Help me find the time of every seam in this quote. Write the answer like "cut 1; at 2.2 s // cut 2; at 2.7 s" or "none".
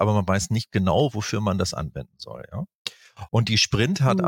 cut 1; at 3.3 s